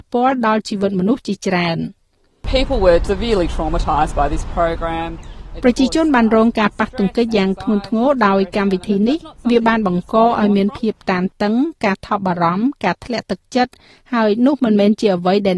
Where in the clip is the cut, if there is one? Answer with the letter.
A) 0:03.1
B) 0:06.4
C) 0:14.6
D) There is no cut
A